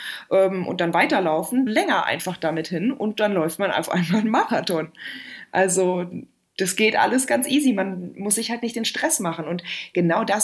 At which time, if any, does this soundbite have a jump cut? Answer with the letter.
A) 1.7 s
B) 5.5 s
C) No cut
A